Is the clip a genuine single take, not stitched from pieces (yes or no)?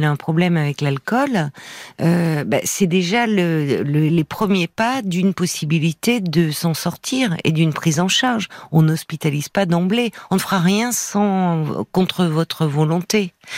yes